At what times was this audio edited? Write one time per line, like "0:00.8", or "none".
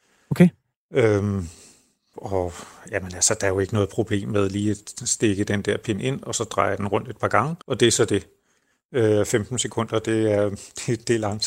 0:02.1
0:07.6